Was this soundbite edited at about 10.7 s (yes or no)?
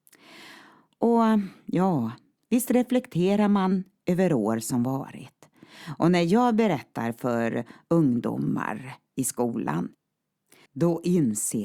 yes